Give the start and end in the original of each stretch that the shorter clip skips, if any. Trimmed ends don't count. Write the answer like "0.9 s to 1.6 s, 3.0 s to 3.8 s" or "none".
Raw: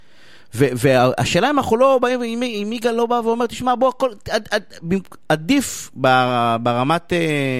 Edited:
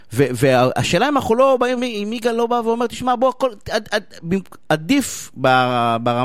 2.2 s to 2.4 s